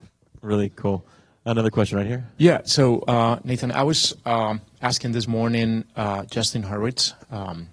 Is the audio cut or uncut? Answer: uncut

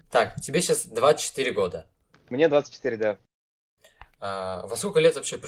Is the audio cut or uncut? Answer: uncut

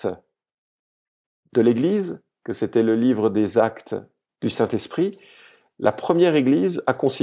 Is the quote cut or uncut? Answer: uncut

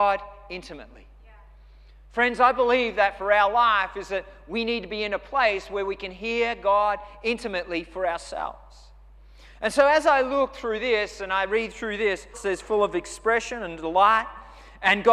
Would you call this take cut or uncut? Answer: cut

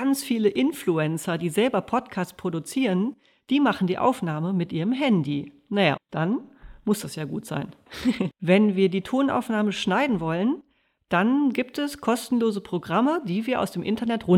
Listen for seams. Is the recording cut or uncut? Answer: cut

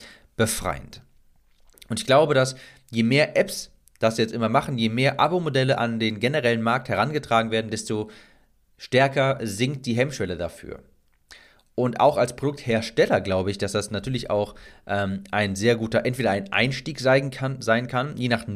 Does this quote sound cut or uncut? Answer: uncut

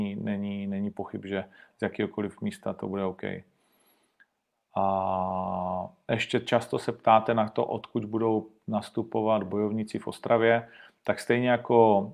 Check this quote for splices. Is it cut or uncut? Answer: uncut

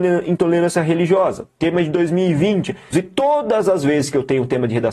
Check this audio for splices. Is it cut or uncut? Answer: cut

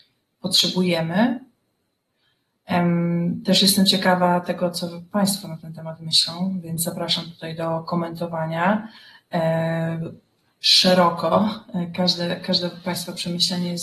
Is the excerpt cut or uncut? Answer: uncut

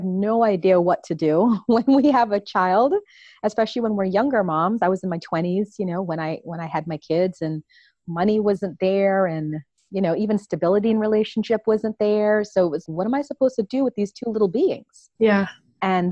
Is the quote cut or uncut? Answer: cut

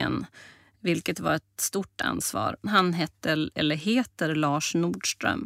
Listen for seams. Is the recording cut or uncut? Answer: cut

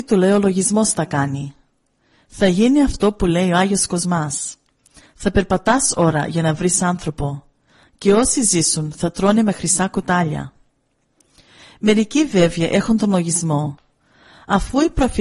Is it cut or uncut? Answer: uncut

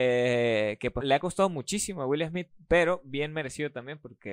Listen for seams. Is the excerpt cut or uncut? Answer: cut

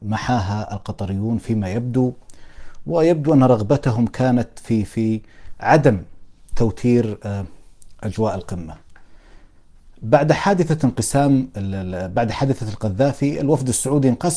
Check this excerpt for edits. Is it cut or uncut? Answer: uncut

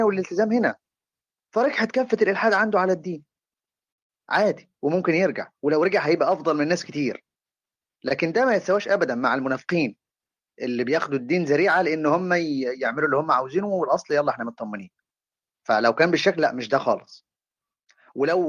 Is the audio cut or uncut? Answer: uncut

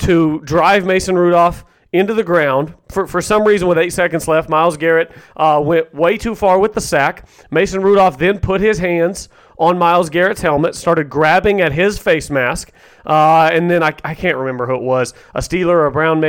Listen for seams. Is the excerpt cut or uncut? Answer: uncut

